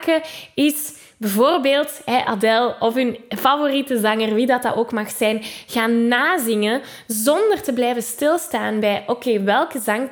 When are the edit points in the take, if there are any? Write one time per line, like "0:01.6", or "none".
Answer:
none